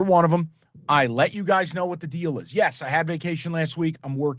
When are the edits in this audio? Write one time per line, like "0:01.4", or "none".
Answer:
none